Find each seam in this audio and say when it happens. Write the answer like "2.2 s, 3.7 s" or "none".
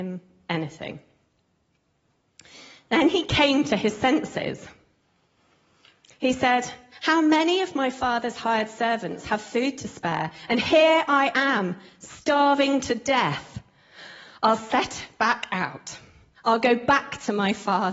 none